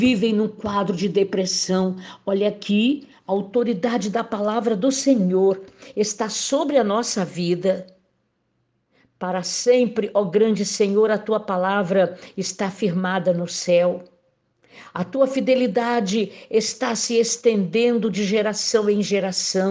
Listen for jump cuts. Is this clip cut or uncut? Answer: uncut